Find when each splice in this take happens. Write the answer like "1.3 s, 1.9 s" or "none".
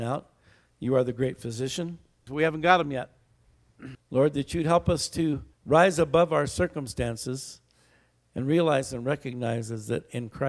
2.3 s, 3.9 s, 5.5 s